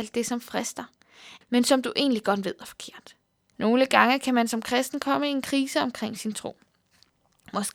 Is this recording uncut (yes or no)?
no